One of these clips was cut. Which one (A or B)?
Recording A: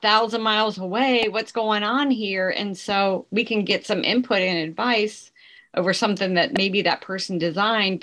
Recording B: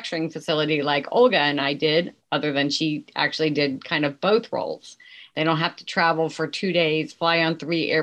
B